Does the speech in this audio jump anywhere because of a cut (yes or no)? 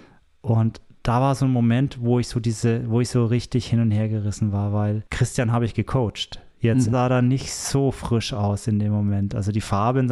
yes